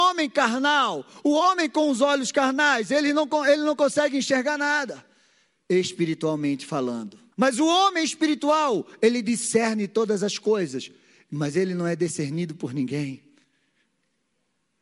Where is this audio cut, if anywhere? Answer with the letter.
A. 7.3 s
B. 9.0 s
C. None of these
A